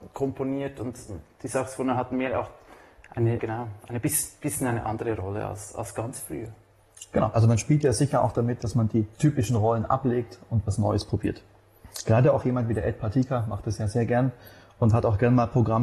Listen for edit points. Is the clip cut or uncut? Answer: cut